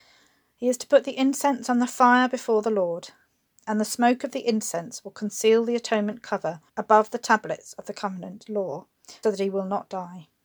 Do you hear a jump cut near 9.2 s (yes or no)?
yes